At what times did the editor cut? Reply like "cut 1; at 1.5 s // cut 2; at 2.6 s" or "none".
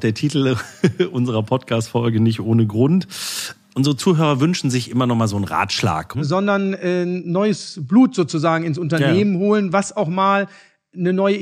cut 1; at 6.1 s